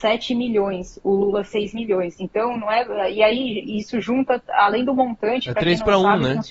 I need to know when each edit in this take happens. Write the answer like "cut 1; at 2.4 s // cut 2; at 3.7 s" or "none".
none